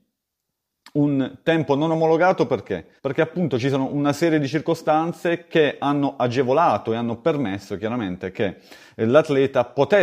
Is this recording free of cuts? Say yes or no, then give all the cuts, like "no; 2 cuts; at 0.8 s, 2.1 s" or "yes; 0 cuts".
no; 1 cut; at 3.0 s